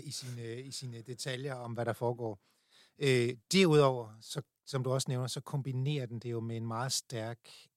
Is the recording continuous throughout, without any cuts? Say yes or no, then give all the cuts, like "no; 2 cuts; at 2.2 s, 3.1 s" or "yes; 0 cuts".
yes; 0 cuts